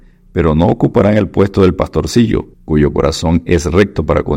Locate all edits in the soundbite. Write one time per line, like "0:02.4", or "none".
0:02.5